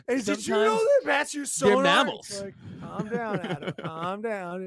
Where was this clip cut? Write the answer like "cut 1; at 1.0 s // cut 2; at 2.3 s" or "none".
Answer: none